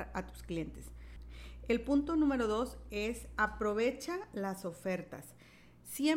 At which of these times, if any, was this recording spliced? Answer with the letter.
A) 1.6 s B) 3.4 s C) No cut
C